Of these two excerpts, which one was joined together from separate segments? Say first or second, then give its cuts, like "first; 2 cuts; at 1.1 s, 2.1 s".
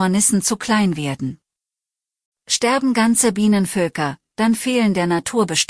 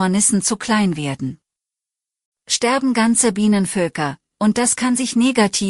second; 1 cut; at 4.3 s